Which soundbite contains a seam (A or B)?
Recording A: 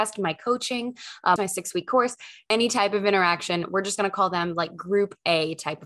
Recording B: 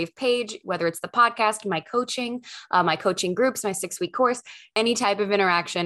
A